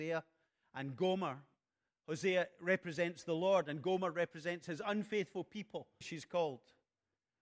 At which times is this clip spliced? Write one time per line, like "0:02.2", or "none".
0:06.0